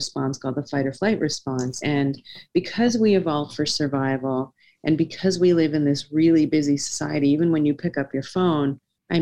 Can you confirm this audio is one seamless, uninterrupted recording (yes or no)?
yes